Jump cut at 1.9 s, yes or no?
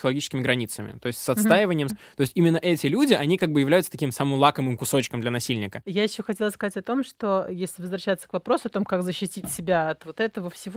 yes